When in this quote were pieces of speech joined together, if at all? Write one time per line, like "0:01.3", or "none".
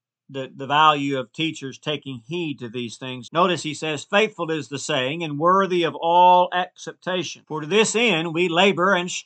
0:03.3
0:07.4